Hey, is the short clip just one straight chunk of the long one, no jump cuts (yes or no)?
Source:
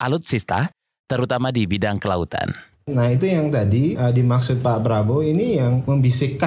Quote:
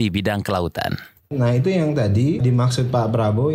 no